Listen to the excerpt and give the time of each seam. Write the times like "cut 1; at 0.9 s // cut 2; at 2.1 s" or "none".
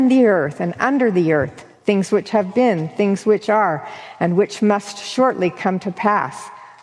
none